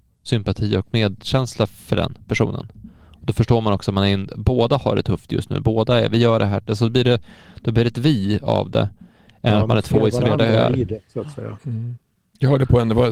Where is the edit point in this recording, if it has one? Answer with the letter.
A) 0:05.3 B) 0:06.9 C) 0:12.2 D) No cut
D